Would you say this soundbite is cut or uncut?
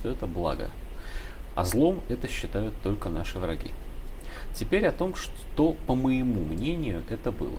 uncut